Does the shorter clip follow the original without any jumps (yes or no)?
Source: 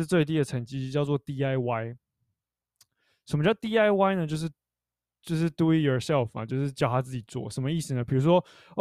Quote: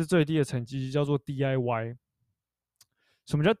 yes